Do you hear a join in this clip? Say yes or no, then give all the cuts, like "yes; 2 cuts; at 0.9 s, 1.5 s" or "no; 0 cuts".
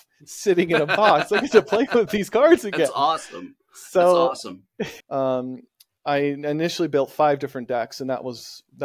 yes; 1 cut; at 5.0 s